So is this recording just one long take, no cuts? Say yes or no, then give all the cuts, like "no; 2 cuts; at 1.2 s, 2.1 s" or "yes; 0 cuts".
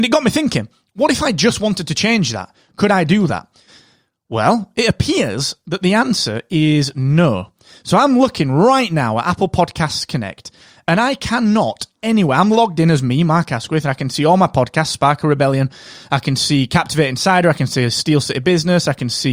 yes; 0 cuts